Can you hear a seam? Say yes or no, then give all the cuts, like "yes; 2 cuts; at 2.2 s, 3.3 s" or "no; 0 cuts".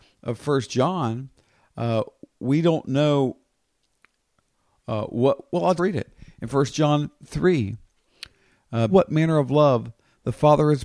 yes; 2 cuts; at 5.8 s, 8.9 s